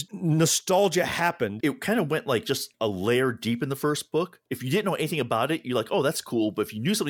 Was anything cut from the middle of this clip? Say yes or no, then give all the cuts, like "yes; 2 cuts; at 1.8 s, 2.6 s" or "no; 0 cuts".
yes; 1 cut; at 1.6 s